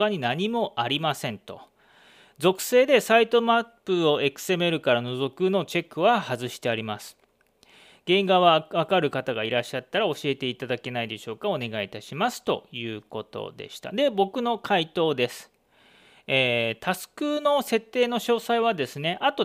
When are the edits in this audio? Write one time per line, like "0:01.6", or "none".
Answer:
none